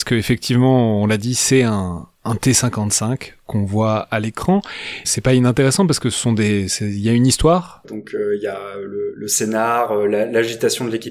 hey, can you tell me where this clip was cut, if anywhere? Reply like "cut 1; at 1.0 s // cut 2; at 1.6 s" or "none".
cut 1; at 5.0 s // cut 2; at 7.8 s